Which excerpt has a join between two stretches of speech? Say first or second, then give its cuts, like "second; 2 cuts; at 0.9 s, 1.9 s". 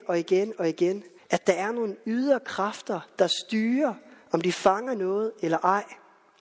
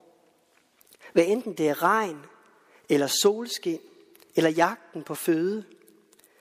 first; 1 cut; at 1.2 s